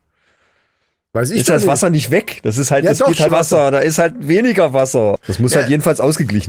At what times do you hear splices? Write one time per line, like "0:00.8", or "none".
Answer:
0:03.3
0:05.2

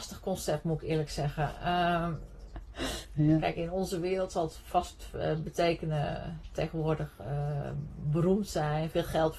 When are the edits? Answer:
none

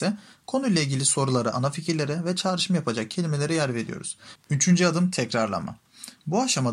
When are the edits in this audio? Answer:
0:01.5
0:04.4

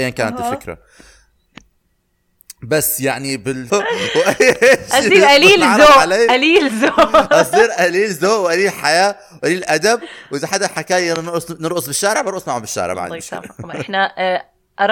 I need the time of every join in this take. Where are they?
0:03.7

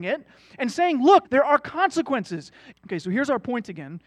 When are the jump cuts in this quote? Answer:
0:01.2
0:02.7

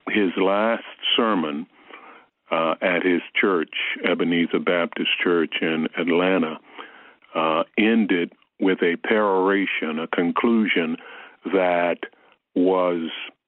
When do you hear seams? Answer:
none

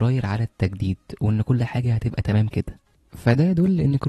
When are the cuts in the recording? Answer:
0:02.5

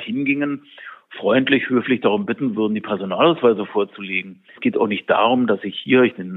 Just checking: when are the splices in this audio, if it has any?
0:04.6

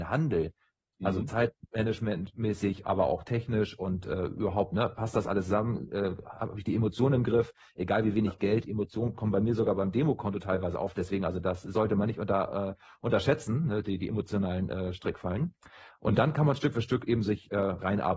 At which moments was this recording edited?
none

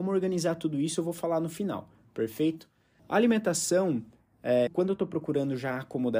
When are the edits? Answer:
0:03.0
0:04.7

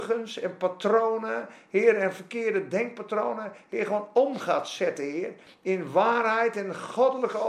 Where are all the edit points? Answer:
none

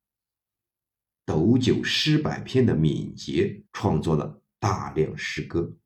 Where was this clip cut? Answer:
0:01.1
0:03.7

